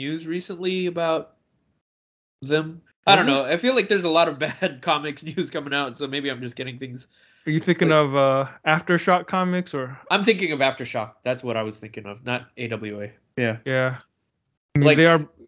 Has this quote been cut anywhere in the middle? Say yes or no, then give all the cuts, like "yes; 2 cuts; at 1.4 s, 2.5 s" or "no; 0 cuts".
yes; 2 cuts; at 2.9 s, 13.3 s